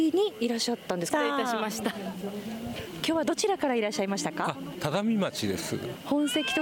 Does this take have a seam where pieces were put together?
yes; 1 cut; at 1.1 s

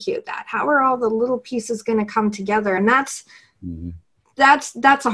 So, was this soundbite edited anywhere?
no; 0 cuts

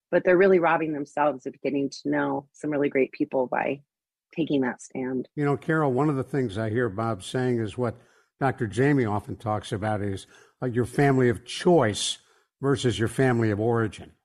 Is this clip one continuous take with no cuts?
yes; 0 cuts

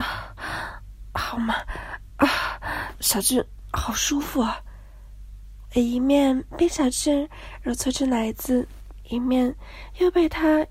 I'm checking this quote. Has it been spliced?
no; 0 cuts

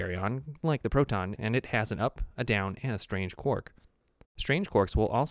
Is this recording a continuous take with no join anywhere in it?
no; 2 cuts; at 1.3 s, 4.2 s

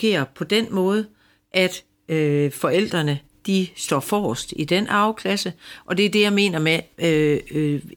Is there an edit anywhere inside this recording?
no; 0 cuts

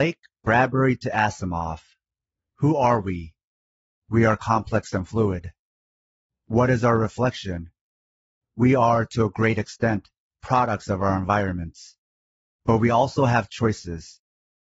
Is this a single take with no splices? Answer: yes; 0 cuts

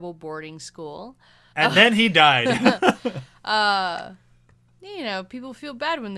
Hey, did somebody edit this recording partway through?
yes; 1 cut; at 1.5 s

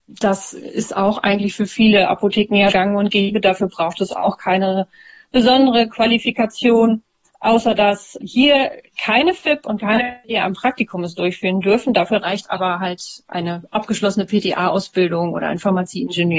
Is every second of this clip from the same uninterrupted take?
no; 2 cuts; at 2.7 s, 8.9 s

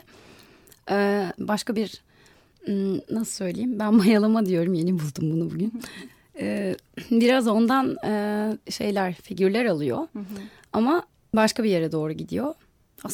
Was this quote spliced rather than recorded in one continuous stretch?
yes; 1 cut; at 1.4 s

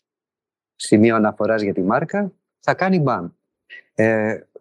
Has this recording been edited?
no; 0 cuts

